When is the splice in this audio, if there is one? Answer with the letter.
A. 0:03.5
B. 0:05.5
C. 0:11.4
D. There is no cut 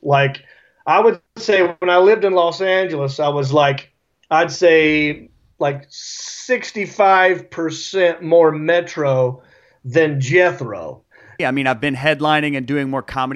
C